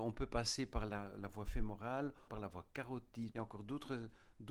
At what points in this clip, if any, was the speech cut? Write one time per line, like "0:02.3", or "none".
0:02.3
0:03.3